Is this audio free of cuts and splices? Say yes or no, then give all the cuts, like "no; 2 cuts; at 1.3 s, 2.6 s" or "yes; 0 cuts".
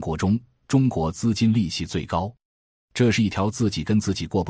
yes; 0 cuts